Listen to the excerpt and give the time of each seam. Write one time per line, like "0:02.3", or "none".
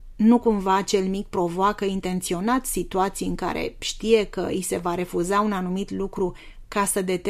none